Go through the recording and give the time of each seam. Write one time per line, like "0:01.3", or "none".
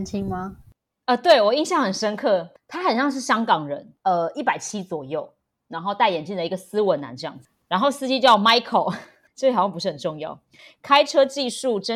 none